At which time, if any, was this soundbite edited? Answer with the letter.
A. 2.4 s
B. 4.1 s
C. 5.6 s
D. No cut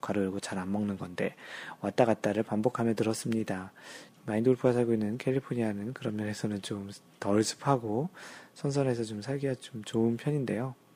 B